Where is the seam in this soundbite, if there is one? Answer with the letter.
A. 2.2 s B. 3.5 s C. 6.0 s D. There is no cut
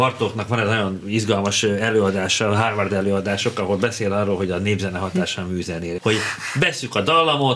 C